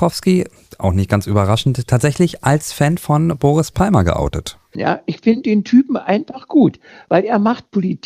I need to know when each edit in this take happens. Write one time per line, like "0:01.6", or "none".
0:04.8